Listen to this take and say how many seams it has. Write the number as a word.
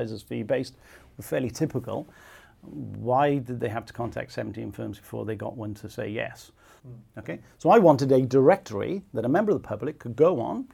one